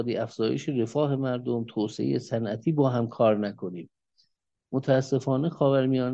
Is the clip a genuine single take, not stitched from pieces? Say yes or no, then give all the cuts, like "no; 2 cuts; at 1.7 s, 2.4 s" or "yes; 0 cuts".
yes; 0 cuts